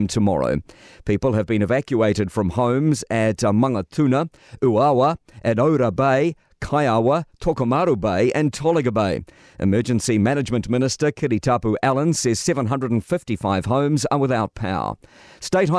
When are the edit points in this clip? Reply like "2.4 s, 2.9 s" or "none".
none